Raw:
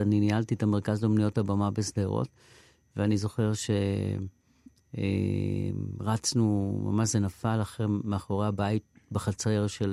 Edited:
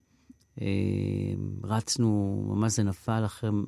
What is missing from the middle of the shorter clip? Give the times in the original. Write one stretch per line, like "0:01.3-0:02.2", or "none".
none